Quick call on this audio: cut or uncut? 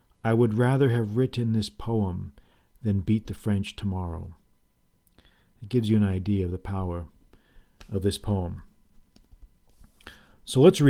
uncut